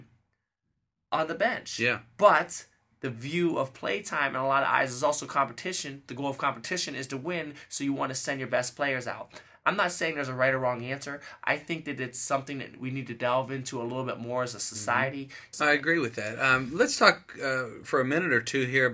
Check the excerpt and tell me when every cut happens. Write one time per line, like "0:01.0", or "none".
0:15.5
0:17.8